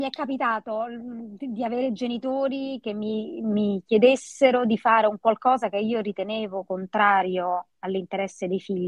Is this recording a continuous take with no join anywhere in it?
yes; 0 cuts

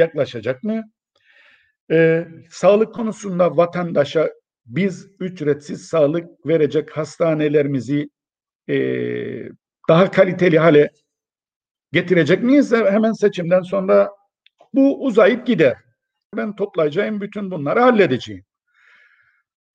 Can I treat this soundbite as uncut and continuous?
no; 1 cut; at 16.3 s

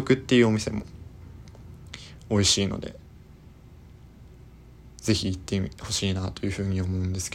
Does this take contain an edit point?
no; 0 cuts

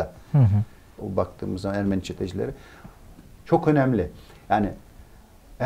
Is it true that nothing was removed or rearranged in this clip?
no; 2 cuts; at 1.0 s, 3.4 s

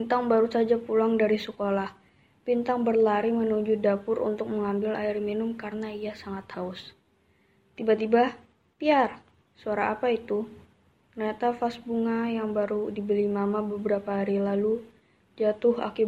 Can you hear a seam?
no; 0 cuts

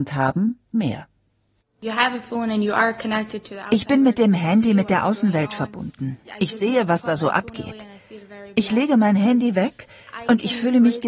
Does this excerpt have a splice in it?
no; 0 cuts

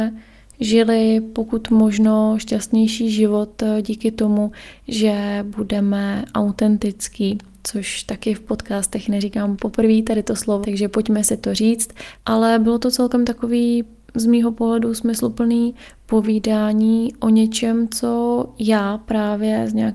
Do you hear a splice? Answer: yes; 2 cuts; at 10.6 s, 12.2 s

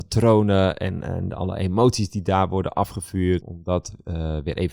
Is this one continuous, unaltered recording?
no; 1 cut; at 3.4 s

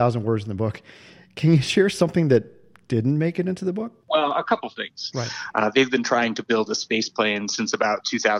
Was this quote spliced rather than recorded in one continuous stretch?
yes; 2 cuts; at 4.0 s, 5.1 s

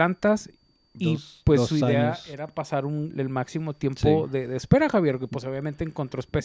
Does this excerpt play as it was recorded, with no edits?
no; 1 cut; at 3.1 s

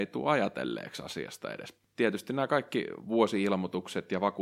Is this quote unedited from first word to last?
yes; 0 cuts

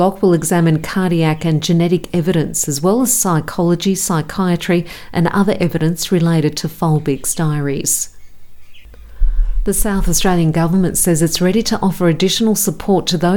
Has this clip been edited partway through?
no; 0 cuts

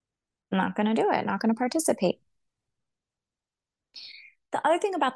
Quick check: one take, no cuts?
yes; 0 cuts

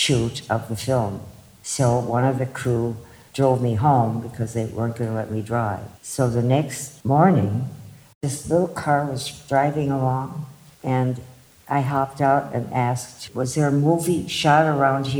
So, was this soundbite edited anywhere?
yes; 1 cut; at 6.0 s

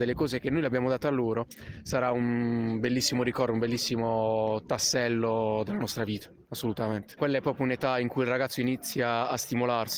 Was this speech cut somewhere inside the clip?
yes; 1 cut; at 7.2 s

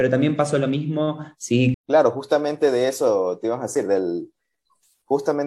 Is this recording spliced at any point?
yes; 1 cut; at 1.7 s

